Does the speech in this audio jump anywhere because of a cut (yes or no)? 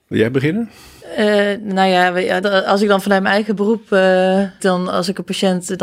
yes